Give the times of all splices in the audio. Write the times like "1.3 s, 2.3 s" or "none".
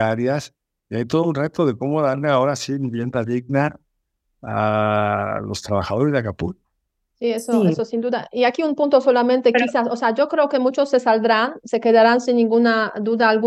none